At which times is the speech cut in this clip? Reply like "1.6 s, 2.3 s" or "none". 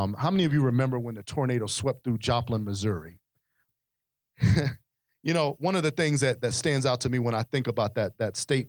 3.7 s